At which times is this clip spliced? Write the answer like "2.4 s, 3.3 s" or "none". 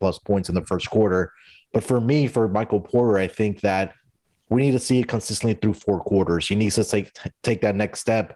none